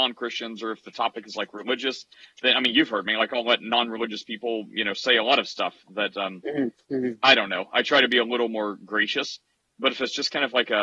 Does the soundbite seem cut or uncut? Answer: uncut